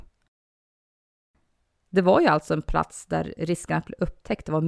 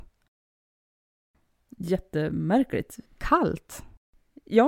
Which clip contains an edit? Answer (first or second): second